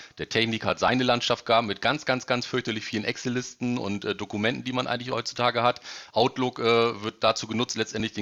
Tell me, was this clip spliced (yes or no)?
no